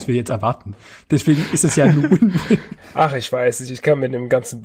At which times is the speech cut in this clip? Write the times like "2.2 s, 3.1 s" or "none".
none